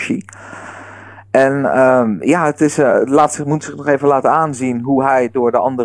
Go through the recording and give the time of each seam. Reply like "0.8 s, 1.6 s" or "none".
none

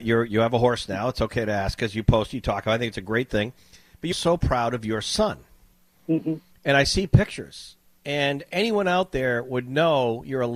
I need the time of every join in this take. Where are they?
4.1 s

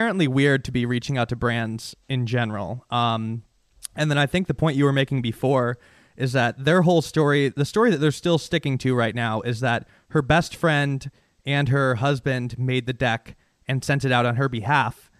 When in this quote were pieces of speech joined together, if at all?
none

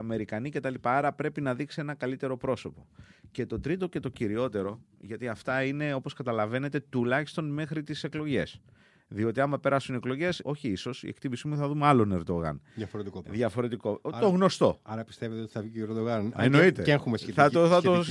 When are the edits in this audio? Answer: 10.4 s

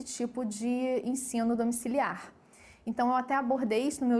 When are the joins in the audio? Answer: none

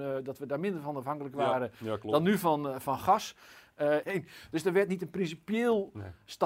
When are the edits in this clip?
4.0 s

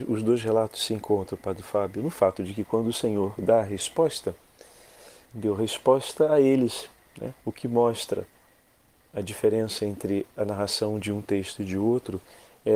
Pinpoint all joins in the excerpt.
5.3 s, 7.4 s

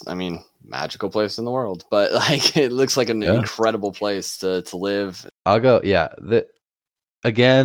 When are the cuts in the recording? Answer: 5.3 s

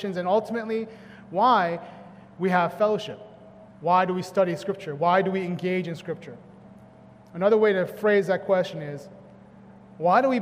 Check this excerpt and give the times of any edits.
3.7 s

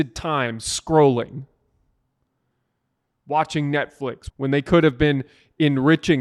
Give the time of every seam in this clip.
4.3 s

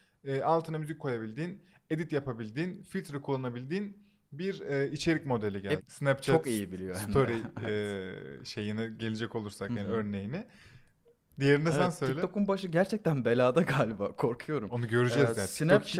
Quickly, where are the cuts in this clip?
5.8 s

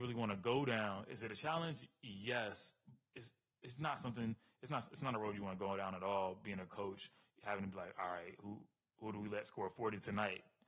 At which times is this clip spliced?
none

